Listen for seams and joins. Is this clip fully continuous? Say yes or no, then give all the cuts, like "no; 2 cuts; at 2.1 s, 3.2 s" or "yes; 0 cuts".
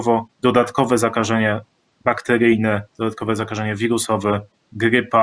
yes; 0 cuts